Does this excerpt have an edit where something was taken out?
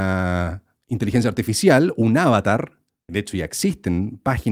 yes; 1 cut; at 3.1 s

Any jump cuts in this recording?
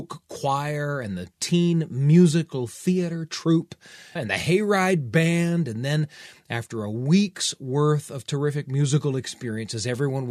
yes; 1 cut; at 4.2 s

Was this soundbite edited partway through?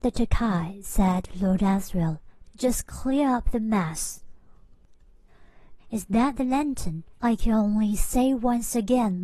yes; 3 cuts; at 2.4 s, 5.8 s, 7.1 s

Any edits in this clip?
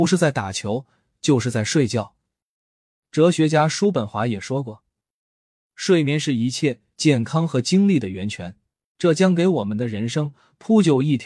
yes; 1 cut; at 8.9 s

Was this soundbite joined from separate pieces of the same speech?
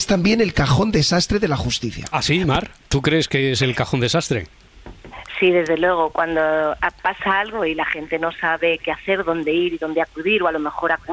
no; 0 cuts

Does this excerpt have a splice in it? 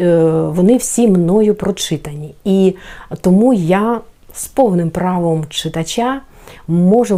no; 0 cuts

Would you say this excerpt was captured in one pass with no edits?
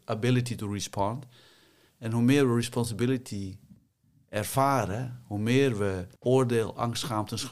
no; 1 cut; at 6.2 s

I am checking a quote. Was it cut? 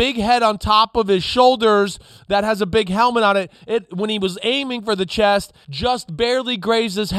yes; 1 cut; at 5.6 s

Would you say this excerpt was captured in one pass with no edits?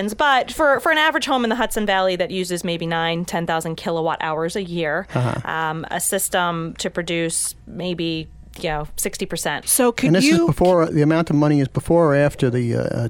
no; 2 cuts; at 9.6 s, 10.9 s

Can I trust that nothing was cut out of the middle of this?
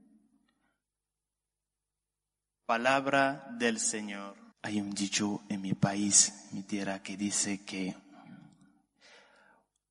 no; 1 cut; at 4.5 s

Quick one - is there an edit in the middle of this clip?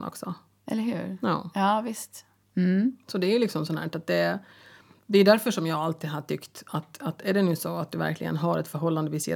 no; 0 cuts

